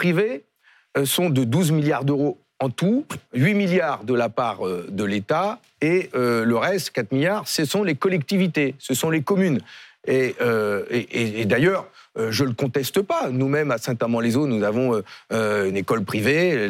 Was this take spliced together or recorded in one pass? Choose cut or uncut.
uncut